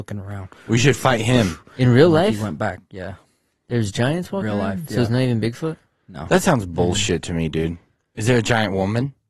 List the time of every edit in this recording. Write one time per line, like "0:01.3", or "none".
none